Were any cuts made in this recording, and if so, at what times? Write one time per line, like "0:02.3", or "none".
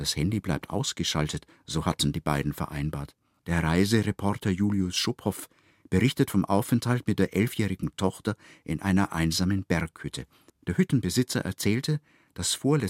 0:03.4
0:10.5

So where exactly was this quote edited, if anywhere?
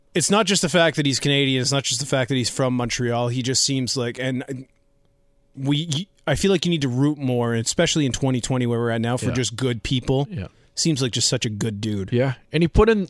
none

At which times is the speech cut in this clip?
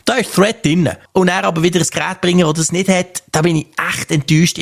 0:01.1

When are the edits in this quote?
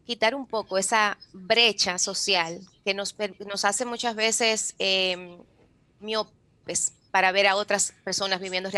none

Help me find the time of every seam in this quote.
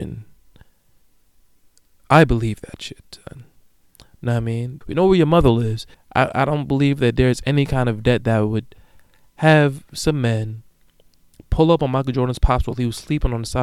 0:04.8
0:05.9

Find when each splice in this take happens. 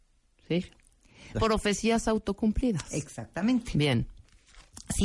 0:01.3

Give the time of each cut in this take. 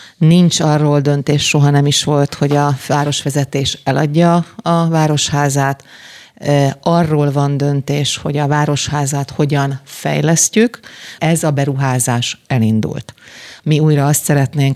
0:11.2
0:13.6

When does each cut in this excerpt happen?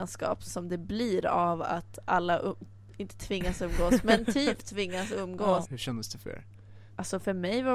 0:05.6

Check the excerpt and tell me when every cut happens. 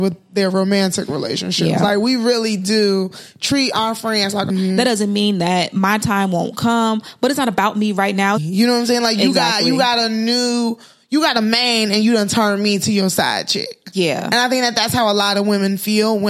0:04.5
0:08.4

